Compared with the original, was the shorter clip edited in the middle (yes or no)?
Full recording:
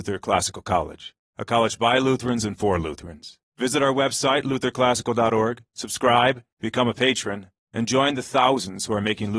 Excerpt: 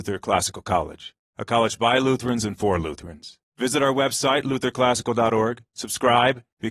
no